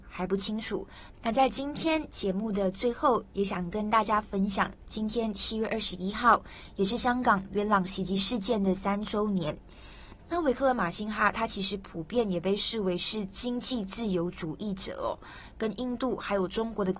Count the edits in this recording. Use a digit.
2